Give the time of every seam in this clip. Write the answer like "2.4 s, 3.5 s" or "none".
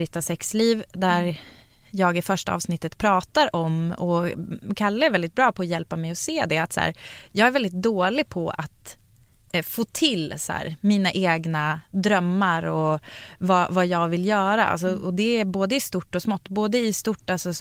none